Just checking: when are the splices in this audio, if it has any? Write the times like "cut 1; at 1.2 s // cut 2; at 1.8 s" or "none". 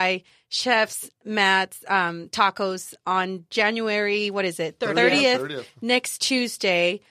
none